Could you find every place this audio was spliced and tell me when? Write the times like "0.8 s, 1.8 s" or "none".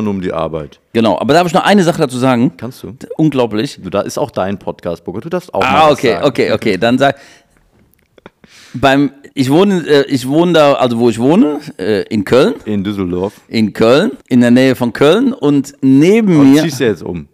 9.3 s, 14.2 s